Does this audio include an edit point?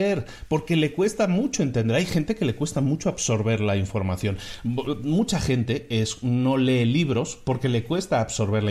no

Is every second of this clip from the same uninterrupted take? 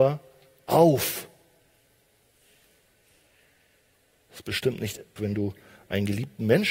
no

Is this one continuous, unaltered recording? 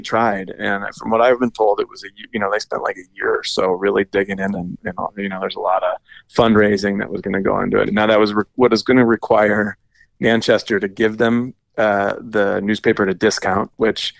no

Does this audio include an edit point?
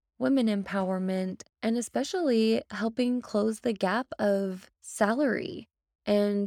yes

